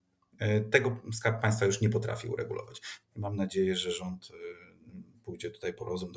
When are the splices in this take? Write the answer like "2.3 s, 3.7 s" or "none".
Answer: 3.0 s

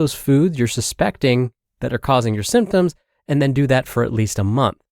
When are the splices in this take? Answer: none

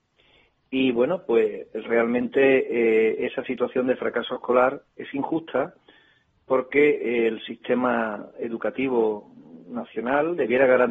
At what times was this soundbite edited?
none

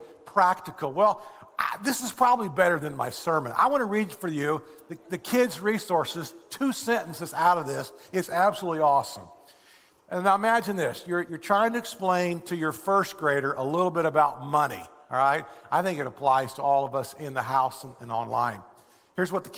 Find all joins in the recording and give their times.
none

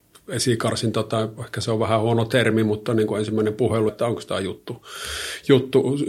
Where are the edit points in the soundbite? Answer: 3.9 s

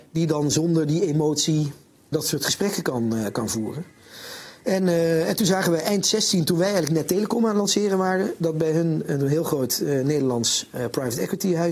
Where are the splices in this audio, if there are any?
2.1 s

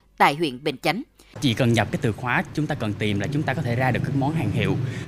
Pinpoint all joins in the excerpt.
1.3 s

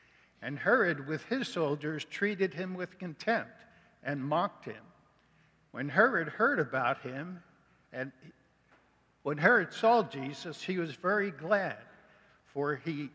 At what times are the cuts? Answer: 5.7 s

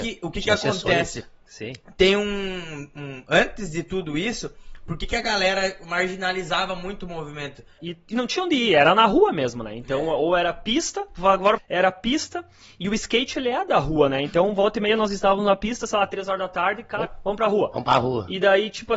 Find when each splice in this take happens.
7.8 s, 11.6 s, 17.1 s

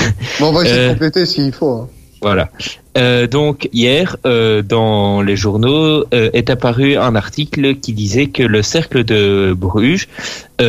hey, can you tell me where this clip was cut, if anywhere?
3.7 s

